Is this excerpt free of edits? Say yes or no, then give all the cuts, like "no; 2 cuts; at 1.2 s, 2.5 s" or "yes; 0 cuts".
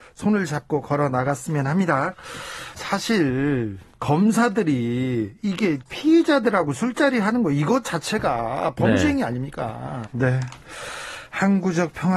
no; 2 cuts; at 2.8 s, 10.1 s